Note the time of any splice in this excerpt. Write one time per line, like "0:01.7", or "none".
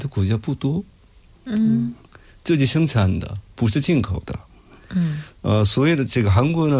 none

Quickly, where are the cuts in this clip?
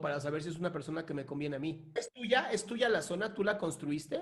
0:02.0

